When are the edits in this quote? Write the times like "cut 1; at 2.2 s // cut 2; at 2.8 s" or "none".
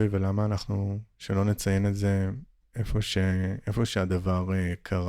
none